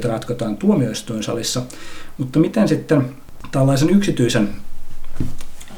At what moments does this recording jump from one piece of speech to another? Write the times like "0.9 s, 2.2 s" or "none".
none